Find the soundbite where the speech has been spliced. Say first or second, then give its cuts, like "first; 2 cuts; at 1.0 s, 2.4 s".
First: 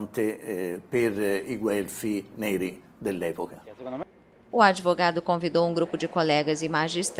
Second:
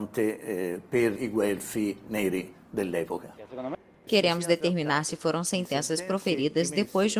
second; 2 cuts; at 1.2 s, 4.1 s